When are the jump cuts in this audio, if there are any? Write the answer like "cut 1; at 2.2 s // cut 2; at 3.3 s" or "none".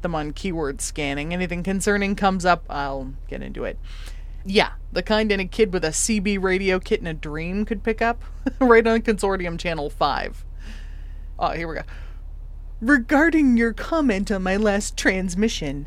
cut 1; at 4.4 s // cut 2; at 11.3 s